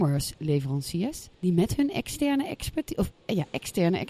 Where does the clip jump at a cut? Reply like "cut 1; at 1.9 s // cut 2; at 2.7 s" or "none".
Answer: cut 1; at 1.3 s